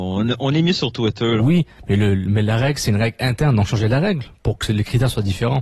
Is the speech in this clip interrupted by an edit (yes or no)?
yes